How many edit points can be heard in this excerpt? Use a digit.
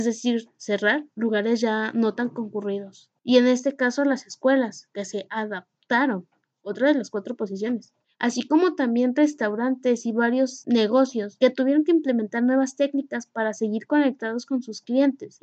1